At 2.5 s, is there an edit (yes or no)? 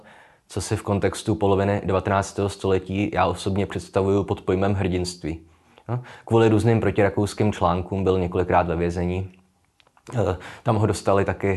no